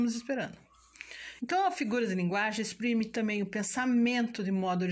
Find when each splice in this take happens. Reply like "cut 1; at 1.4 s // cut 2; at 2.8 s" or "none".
cut 1; at 1.4 s